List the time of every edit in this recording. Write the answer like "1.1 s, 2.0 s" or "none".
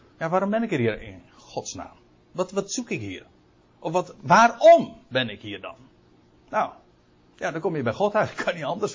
4.1 s